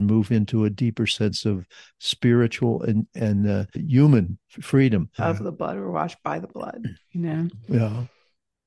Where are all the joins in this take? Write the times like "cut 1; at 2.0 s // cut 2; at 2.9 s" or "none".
cut 1; at 3.7 s // cut 2; at 5.2 s

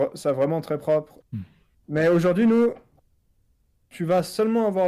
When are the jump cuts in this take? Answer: cut 1; at 1.2 s

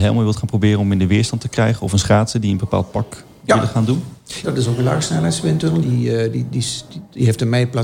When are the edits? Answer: cut 1; at 4.4 s // cut 2; at 5.8 s

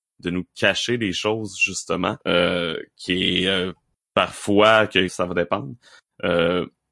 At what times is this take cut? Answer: cut 1; at 2.2 s // cut 2; at 5.1 s

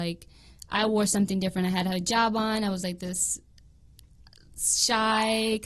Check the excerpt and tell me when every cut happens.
none

